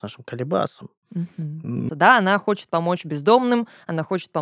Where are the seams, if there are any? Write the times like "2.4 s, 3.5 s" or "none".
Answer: 1.9 s